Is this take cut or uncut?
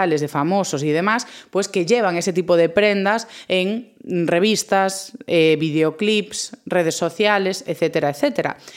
uncut